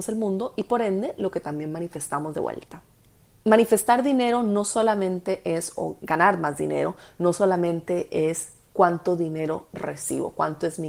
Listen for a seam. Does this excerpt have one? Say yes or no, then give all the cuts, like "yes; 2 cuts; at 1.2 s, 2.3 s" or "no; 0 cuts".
no; 0 cuts